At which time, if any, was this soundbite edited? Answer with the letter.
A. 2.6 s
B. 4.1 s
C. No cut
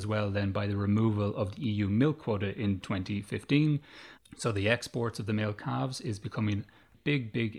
B